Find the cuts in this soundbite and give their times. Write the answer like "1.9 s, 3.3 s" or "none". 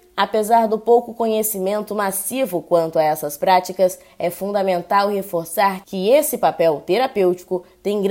none